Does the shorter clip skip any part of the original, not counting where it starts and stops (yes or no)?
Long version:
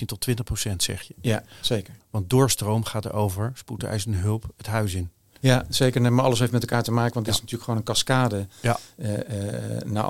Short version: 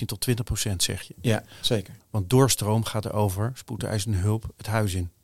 no